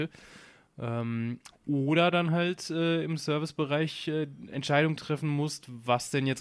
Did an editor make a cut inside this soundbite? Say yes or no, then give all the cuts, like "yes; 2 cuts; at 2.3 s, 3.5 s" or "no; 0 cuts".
no; 0 cuts